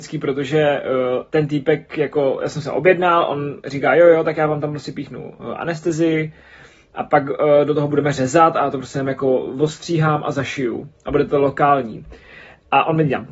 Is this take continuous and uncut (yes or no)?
yes